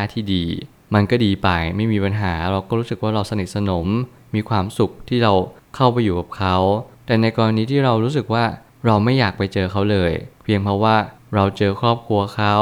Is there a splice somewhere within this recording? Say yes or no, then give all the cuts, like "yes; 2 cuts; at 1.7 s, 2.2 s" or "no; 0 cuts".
no; 0 cuts